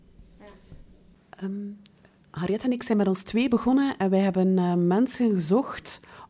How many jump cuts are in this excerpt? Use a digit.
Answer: 0